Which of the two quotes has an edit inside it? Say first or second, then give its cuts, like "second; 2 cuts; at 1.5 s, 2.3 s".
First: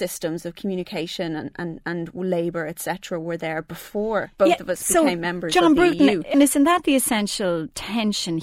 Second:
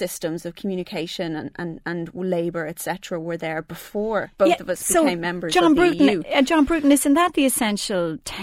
first; 1 cut; at 6.3 s